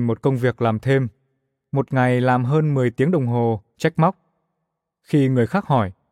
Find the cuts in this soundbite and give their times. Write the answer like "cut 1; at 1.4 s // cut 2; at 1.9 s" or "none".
cut 1; at 3.7 s